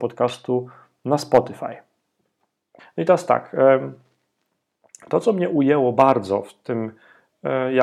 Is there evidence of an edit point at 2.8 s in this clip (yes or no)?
yes